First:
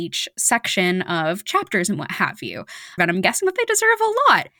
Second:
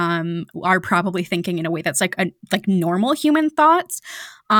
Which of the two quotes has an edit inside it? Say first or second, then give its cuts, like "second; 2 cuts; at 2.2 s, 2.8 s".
first; 1 cut; at 3.0 s